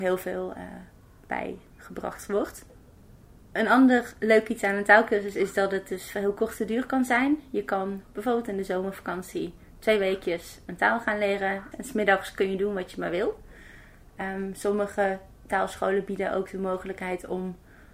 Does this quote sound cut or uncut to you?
cut